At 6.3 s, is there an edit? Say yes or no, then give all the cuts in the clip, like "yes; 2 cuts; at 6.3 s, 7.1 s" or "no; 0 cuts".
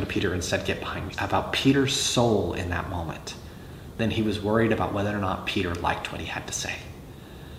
no; 1 cut; at 1.1 s